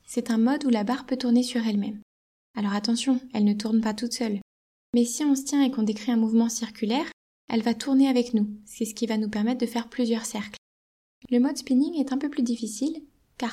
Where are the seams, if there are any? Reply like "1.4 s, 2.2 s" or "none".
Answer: none